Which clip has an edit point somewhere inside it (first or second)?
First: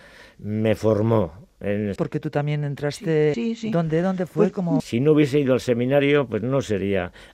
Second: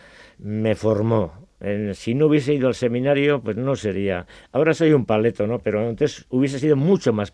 first